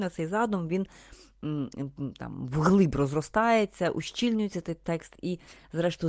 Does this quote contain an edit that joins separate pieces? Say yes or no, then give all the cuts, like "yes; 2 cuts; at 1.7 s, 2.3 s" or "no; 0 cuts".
no; 0 cuts